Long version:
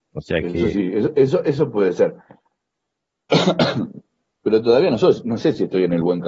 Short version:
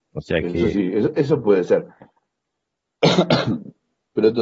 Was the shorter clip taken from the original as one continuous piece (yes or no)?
no